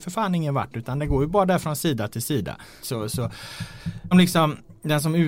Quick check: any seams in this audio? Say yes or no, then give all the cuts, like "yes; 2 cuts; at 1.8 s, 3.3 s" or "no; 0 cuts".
yes; 2 cuts; at 2.8 s, 4.1 s